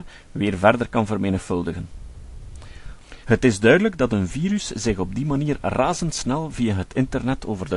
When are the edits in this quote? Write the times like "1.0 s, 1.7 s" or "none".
3.2 s